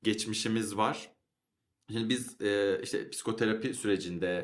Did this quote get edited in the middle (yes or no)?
no